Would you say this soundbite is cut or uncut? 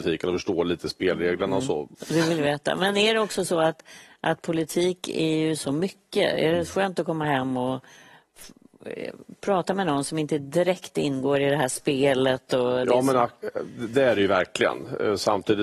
cut